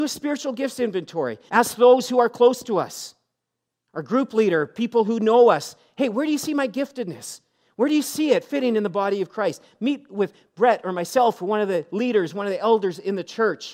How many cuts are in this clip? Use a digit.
1